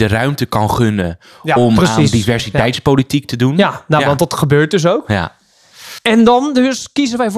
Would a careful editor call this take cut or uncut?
uncut